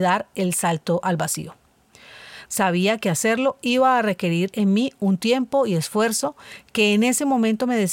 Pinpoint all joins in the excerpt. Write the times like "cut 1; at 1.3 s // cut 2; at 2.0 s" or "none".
cut 1; at 2.5 s

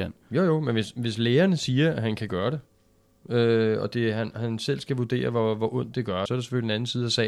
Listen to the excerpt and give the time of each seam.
cut 1; at 6.3 s

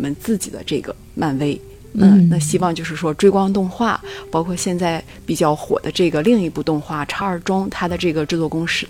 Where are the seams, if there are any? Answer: cut 1; at 7.2 s

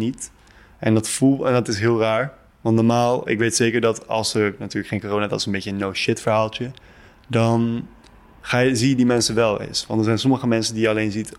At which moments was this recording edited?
none

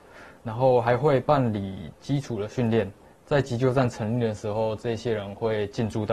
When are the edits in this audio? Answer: none

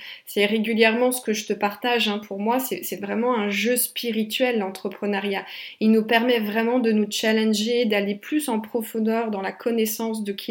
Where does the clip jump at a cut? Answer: none

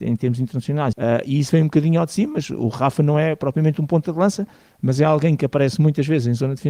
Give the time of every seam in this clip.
cut 1; at 0.9 s

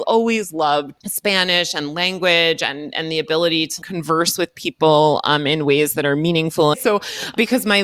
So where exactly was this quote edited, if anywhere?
cut 1; at 6.7 s

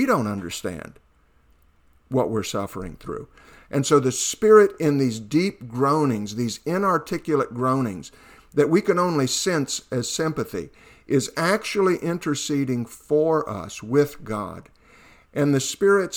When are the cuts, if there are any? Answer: none

